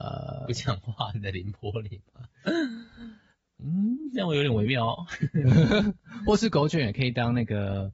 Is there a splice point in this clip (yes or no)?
yes